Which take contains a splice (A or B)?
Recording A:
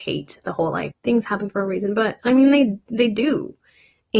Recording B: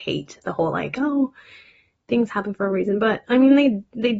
A